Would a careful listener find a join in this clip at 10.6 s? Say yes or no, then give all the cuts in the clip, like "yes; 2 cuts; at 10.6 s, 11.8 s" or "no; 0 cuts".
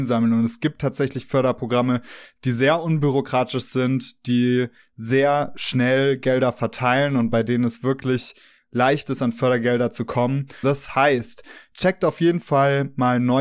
yes; 1 cut; at 10.6 s